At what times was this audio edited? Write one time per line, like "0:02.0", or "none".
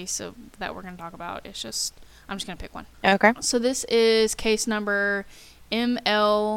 0:03.4